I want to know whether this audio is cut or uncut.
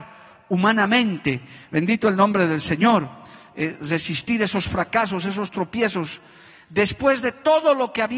uncut